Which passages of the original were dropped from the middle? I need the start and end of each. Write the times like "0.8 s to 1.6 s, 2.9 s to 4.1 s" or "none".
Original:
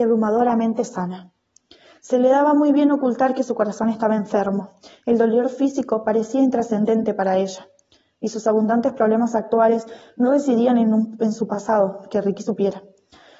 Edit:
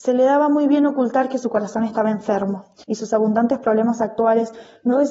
4.9 s to 8.2 s